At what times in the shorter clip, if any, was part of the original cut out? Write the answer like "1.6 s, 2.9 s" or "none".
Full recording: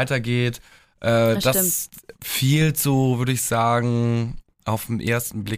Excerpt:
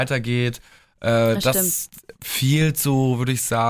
none